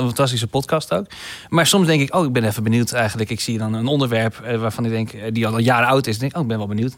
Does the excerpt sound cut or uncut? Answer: uncut